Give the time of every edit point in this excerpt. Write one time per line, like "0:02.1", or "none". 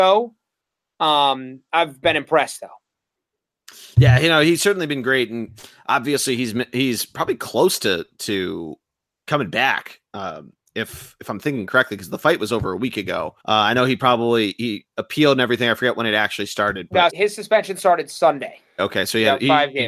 0:13.4
0:17.1
0:18.8